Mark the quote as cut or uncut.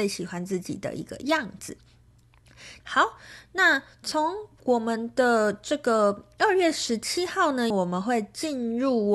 cut